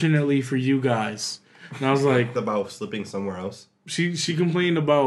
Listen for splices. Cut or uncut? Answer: cut